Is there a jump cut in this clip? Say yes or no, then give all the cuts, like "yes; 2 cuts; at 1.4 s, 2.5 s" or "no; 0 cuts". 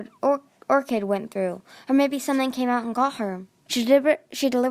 yes; 1 cut; at 3.7 s